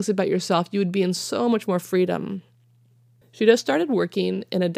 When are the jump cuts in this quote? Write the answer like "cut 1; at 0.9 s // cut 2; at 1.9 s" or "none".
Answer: cut 1; at 3.2 s